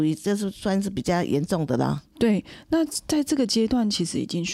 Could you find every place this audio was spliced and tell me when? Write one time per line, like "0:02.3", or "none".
none